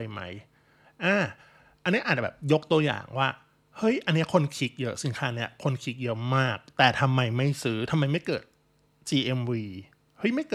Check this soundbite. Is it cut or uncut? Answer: uncut